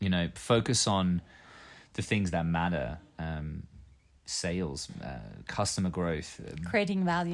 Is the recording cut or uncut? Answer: uncut